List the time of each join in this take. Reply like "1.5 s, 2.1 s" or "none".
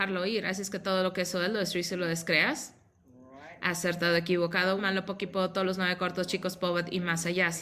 4.8 s